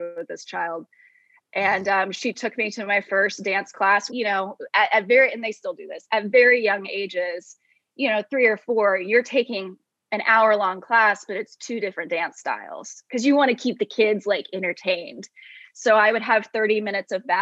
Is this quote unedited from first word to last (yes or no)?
no